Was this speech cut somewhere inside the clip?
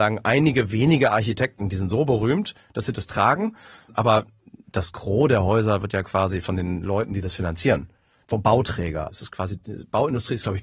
yes; 1 cut; at 9.1 s

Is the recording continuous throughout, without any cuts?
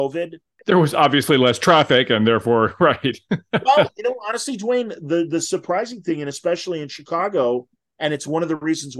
yes; 0 cuts

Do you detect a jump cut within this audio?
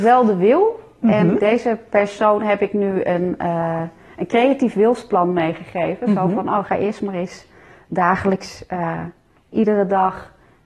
yes; 1 cut; at 1.4 s

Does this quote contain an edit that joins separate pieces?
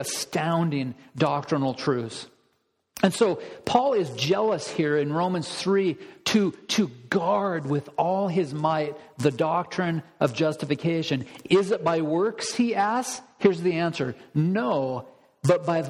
no; 0 cuts

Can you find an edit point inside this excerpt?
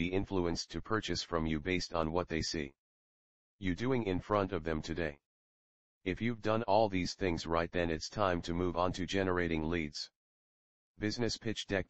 no; 0 cuts

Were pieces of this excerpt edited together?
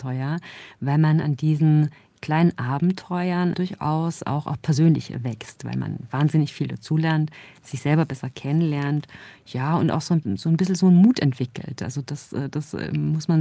no; 0 cuts

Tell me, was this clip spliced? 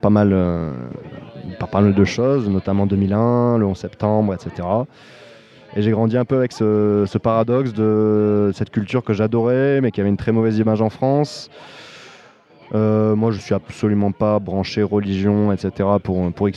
no; 0 cuts

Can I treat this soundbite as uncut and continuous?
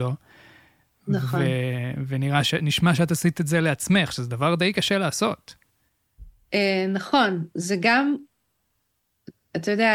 yes; 0 cuts

